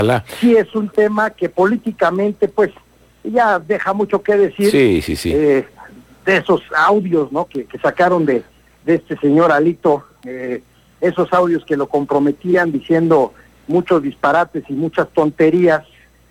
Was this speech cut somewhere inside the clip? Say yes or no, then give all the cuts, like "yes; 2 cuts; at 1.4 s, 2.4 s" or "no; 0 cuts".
yes; 1 cut; at 7.7 s